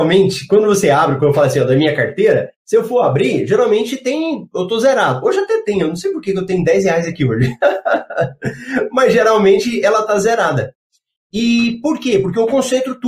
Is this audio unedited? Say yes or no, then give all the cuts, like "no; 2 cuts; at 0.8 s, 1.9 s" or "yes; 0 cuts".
yes; 0 cuts